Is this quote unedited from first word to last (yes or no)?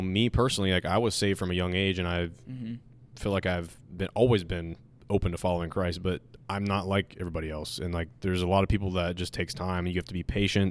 no